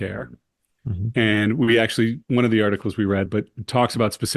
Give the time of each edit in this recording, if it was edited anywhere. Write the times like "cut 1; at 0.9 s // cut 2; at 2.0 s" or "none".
cut 1; at 3.3 s